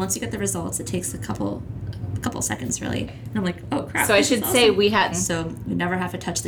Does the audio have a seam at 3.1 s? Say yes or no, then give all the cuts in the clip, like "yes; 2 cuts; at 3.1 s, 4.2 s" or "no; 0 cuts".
yes; 2 cuts; at 3.1 s, 5.1 s